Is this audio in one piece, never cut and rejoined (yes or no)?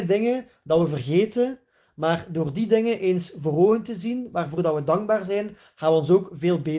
yes